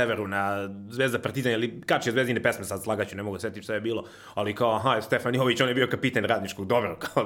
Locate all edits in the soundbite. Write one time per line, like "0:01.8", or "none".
none